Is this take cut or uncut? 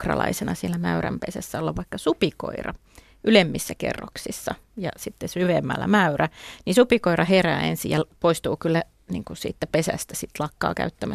uncut